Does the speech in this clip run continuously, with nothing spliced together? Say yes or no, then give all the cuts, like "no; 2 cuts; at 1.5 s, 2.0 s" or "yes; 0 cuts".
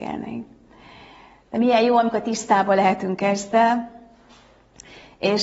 yes; 0 cuts